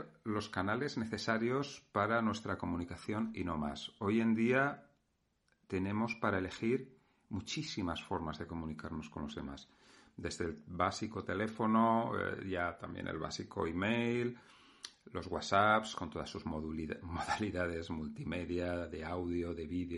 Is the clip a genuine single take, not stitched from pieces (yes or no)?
yes